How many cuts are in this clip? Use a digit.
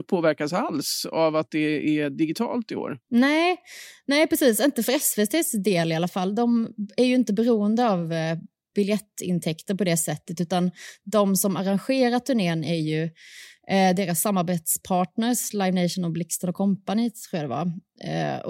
1